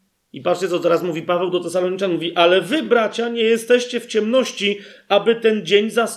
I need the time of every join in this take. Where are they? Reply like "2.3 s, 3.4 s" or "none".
none